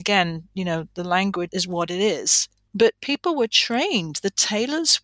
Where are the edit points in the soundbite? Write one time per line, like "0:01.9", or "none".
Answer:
0:01.5
0:02.7